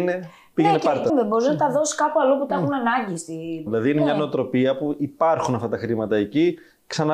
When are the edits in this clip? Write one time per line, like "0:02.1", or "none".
0:01.1
0:03.7